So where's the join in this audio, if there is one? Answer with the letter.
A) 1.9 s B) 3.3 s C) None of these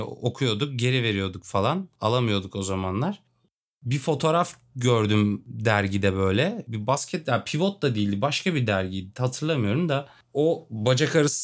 C